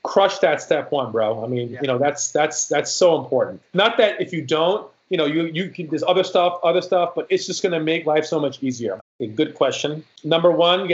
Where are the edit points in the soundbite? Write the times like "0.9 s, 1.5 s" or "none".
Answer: 9.0 s